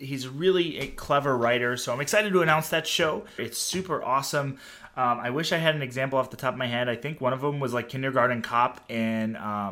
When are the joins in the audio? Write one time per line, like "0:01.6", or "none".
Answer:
0:03.4